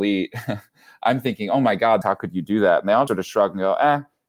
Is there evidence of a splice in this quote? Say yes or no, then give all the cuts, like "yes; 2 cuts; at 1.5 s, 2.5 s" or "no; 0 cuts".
yes; 2 cuts; at 2.0 s, 3.1 s